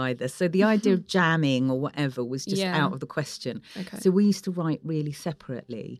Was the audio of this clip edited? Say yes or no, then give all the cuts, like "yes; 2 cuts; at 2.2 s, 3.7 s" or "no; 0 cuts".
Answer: no; 0 cuts